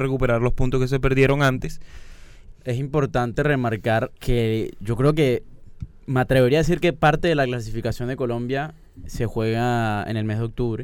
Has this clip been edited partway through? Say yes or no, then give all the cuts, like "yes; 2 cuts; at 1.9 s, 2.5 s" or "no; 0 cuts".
yes; 2 cuts; at 2.5 s, 4.2 s